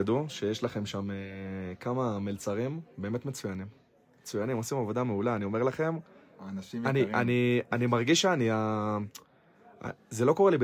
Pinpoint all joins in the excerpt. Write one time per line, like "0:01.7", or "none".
none